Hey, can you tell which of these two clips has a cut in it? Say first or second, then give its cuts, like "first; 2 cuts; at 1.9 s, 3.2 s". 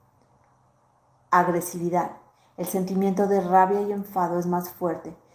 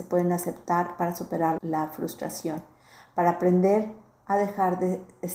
second; 1 cut; at 1.6 s